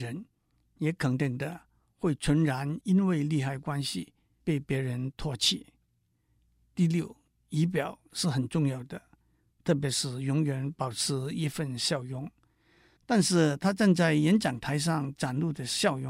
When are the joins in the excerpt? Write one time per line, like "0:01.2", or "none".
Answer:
0:13.0